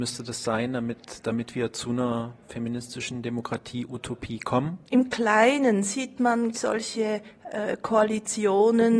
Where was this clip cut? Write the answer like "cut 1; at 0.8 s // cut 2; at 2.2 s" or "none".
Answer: cut 1; at 4.9 s // cut 2; at 6.5 s